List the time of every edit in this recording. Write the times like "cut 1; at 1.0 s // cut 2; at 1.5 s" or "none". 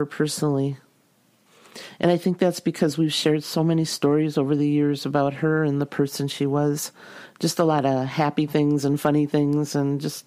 none

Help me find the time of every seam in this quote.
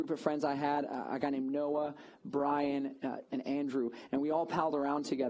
cut 1; at 3.3 s

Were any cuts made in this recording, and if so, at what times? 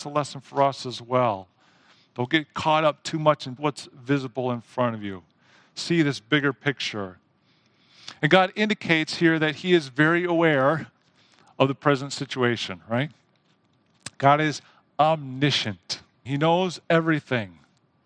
cut 1; at 3.6 s // cut 2; at 16.3 s

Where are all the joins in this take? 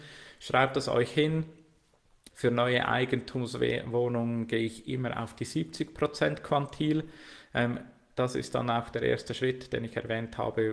cut 1; at 2.3 s

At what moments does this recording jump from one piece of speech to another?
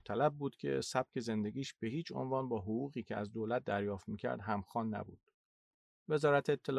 none

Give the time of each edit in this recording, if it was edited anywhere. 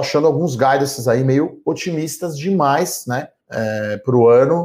cut 1; at 3.4 s

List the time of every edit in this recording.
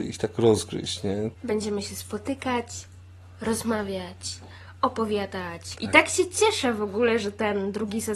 cut 1; at 5.7 s

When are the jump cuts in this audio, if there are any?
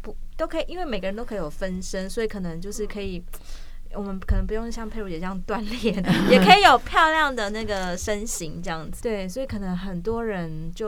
cut 1; at 9.0 s

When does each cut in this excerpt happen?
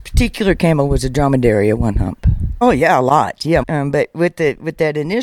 cut 1; at 2.6 s // cut 2; at 3.6 s

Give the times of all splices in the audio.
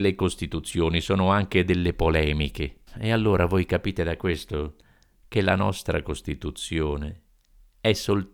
cut 1; at 2.9 s

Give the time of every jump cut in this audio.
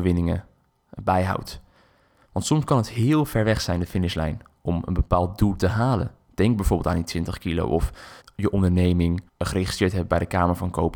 cut 1; at 8.2 s // cut 2; at 9.3 s

